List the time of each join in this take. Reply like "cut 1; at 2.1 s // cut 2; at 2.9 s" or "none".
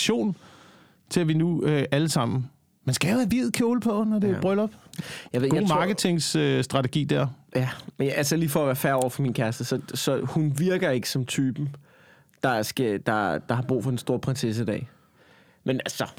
none